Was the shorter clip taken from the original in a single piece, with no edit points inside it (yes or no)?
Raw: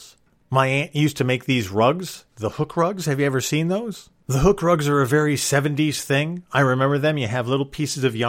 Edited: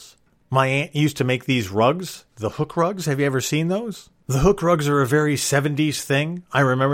yes